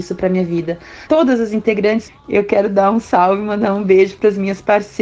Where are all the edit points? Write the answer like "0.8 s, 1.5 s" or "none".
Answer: 1.1 s, 2.1 s